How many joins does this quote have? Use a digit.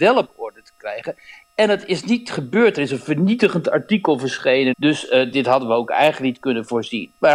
1